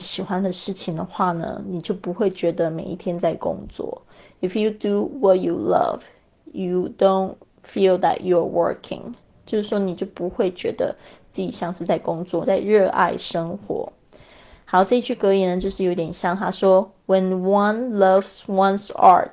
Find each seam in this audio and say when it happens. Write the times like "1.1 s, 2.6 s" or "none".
12.4 s